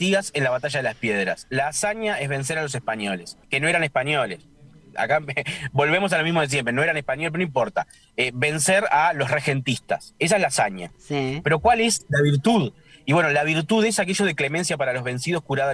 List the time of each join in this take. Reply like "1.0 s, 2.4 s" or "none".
3.4 s